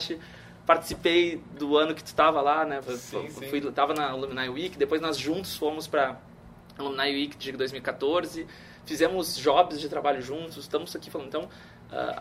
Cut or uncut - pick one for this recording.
uncut